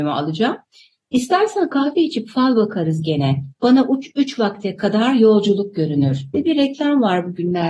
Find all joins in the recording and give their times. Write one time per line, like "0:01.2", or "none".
0:06.3